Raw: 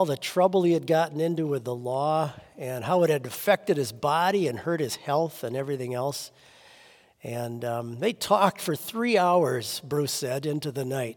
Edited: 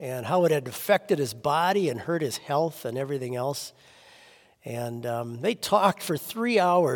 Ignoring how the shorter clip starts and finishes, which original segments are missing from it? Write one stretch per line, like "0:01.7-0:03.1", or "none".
none